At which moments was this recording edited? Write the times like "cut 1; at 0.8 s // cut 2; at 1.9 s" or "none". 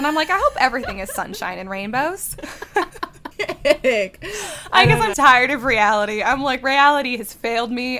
cut 1; at 3.3 s // cut 2; at 5.1 s